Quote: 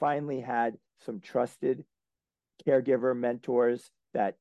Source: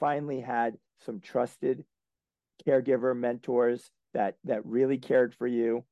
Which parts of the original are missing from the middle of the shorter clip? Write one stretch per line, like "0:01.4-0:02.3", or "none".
none